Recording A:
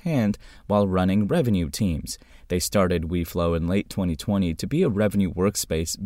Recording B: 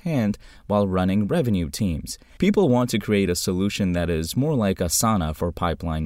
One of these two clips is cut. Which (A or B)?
B